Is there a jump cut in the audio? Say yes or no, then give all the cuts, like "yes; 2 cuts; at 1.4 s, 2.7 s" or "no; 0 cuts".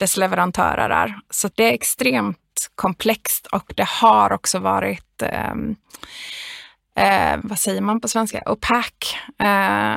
yes; 2 cuts; at 1.5 s, 7.4 s